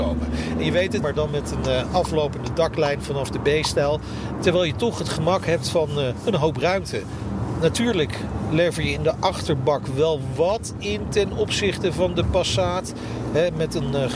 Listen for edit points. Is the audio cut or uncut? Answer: cut